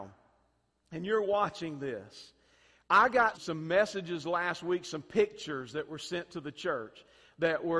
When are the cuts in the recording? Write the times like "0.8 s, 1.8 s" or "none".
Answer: 3.3 s